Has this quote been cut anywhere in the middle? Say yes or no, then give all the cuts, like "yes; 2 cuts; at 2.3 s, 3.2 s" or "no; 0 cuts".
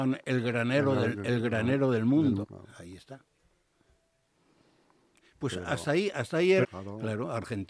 yes; 2 cuts; at 2.4 s, 6.6 s